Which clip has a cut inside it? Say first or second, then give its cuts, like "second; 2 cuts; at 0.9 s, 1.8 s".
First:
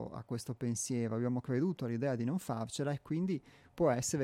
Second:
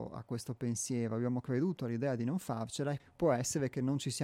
second; 1 cut; at 3.0 s